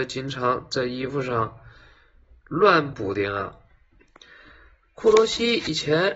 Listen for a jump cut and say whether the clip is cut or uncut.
cut